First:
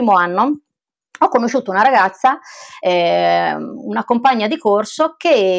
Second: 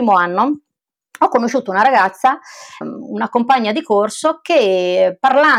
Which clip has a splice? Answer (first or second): second